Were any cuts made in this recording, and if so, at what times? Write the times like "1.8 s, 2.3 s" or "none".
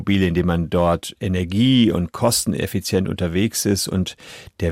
none